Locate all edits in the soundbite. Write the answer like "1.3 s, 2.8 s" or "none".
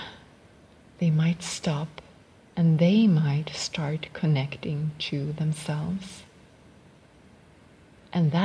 none